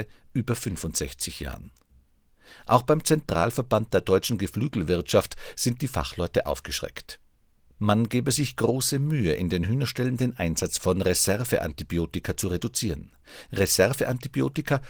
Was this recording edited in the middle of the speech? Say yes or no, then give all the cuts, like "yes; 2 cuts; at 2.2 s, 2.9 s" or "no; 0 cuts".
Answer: yes; 1 cut; at 7.8 s